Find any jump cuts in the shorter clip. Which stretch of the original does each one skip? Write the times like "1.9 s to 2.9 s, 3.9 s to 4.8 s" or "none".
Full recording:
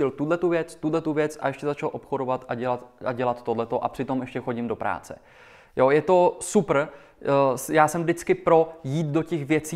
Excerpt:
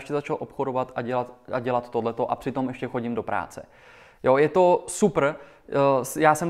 none